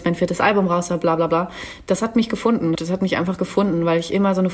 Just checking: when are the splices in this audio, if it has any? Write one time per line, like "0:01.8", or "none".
0:02.8